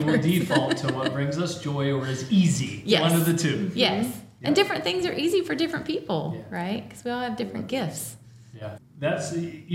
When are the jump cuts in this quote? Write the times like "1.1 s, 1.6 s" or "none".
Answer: 8.8 s